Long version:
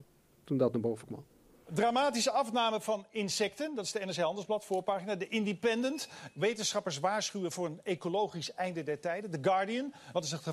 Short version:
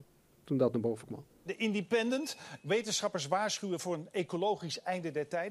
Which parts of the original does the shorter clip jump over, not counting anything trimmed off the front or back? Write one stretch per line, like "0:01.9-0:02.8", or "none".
0:01.5-0:05.2